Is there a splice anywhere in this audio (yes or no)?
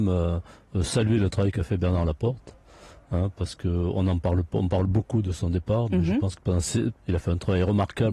yes